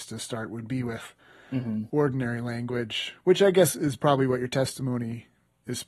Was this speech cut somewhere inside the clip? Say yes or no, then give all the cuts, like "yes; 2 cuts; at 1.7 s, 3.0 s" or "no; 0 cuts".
no; 0 cuts